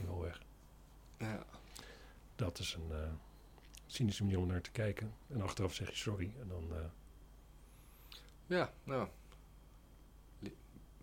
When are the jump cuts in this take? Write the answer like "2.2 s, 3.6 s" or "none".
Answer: none